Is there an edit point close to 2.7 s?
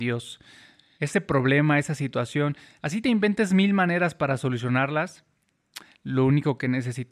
no; 1 cut; at 0.9 s

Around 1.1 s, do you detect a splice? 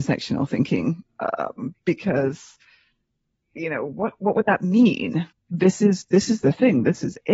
no; 1 cut; at 5.3 s

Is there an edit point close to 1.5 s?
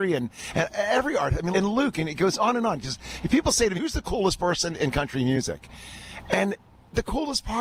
yes; 2 cuts; at 1.5 s, 3.8 s

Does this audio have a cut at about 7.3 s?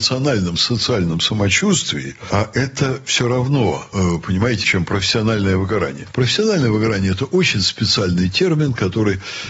no; 1 cut; at 4.6 s

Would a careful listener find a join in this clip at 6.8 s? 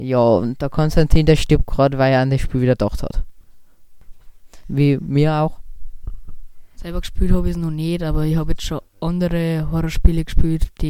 yes; 2 cuts; at 4.6 s, 6.8 s

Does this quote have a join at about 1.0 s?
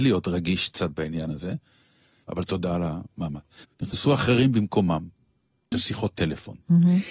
no; 3 cuts; at 2.2 s, 3.6 s, 5.7 s

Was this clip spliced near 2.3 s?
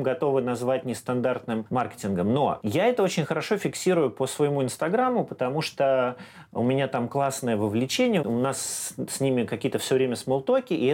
no; 1 cut; at 8.2 s

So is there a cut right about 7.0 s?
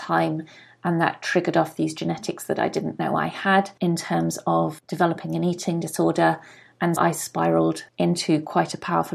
yes; 1 cut; at 7.0 s

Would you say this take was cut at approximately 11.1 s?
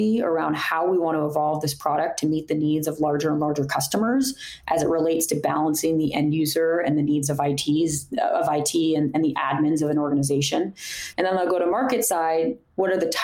yes; 1 cut; at 11.1 s

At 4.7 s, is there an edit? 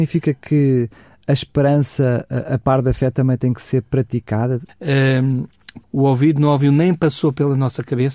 yes; 2 cuts; at 4.7 s, 5.8 s

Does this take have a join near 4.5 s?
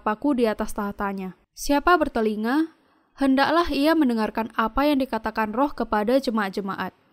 no; 1 cut; at 1.4 s

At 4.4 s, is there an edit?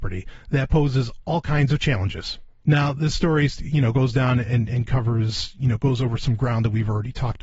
no; 1 cut; at 2.6 s

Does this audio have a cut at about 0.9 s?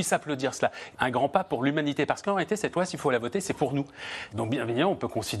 yes; 2 cuts; at 0.9 s, 4.3 s

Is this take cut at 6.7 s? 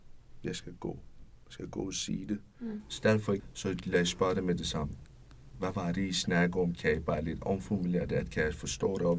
no; 1 cut; at 3.4 s

